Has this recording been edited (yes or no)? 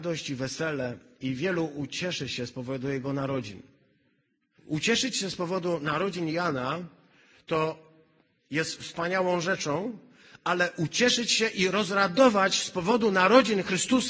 yes